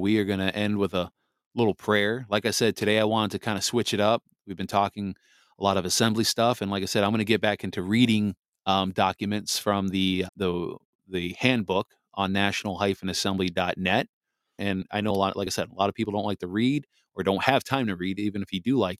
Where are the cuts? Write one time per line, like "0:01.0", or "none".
0:10.3
0:14.6